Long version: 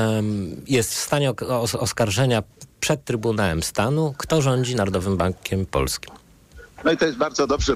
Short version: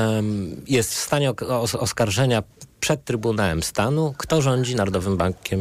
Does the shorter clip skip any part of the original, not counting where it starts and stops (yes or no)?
no